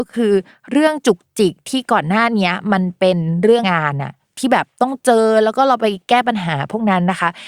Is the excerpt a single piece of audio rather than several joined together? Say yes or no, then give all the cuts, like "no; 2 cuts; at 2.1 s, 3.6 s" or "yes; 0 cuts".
no; 1 cut; at 3.6 s